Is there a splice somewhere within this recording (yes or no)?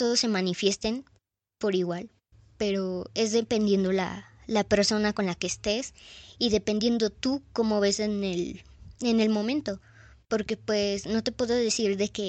no